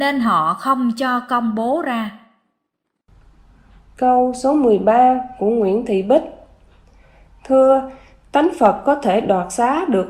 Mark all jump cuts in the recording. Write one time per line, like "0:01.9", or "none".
none